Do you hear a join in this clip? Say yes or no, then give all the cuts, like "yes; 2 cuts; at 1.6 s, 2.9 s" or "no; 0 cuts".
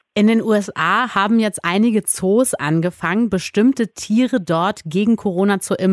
no; 0 cuts